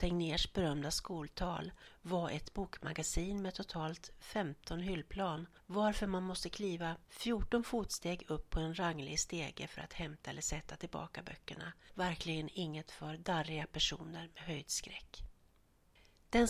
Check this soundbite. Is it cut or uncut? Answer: uncut